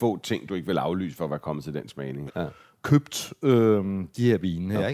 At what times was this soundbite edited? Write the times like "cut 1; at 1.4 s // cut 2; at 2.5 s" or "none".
cut 1; at 2.3 s